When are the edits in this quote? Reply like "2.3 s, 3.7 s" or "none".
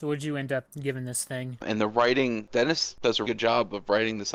1.6 s, 3.2 s